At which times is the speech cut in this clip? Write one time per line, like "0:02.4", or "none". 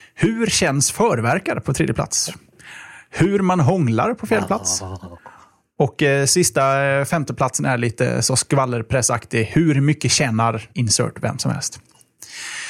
0:10.7

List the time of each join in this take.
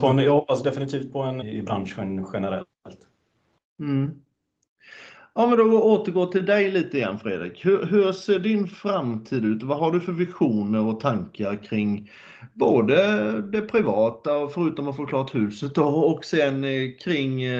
0:01.4

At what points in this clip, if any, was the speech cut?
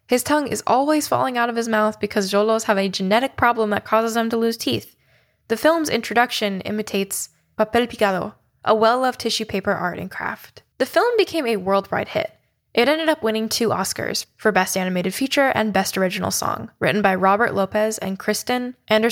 0:10.7
0:16.8

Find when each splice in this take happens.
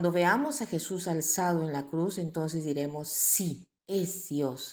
0:03.8

